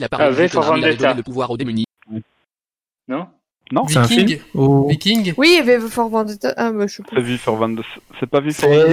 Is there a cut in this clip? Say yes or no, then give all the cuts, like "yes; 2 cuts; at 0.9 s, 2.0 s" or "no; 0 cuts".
no; 0 cuts